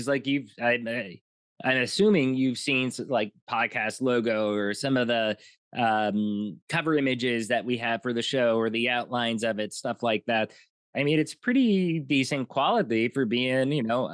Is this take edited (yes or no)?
no